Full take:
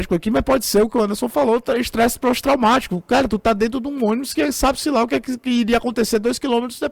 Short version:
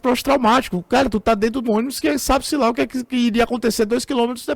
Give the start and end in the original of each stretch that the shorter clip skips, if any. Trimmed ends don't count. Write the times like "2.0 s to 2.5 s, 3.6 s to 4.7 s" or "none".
3.8 s to 4.0 s